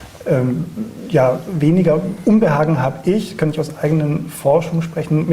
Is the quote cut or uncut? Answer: uncut